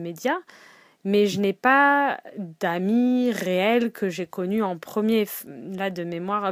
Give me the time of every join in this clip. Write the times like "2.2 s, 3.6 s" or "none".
none